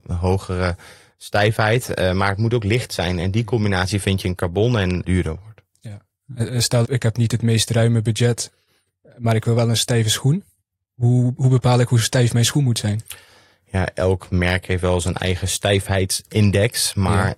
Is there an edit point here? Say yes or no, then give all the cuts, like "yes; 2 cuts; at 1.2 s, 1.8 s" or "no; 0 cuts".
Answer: yes; 2 cuts; at 5.0 s, 6.8 s